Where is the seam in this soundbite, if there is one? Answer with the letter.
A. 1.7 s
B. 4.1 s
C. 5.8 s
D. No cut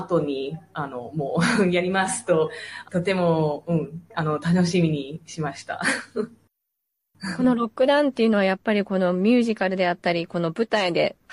B